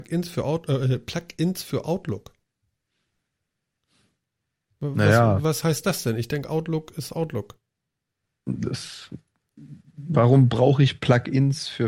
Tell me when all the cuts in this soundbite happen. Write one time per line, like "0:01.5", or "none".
none

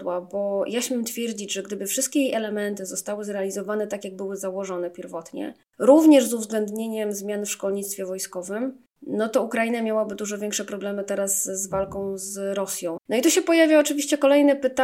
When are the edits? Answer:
0:13.0

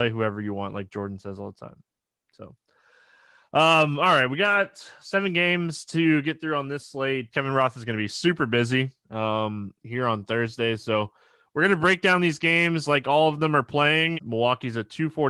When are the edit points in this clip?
0:07.3
0:14.1

